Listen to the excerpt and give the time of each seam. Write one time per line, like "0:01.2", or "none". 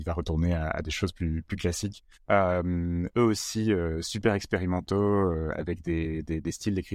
0:02.2